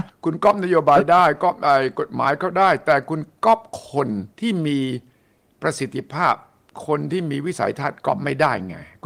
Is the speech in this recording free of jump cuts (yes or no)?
no